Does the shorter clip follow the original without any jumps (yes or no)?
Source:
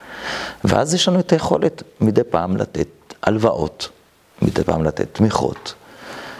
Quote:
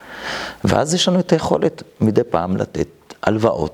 yes